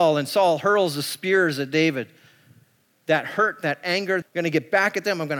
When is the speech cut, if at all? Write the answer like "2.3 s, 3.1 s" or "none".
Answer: 2.9 s, 4.2 s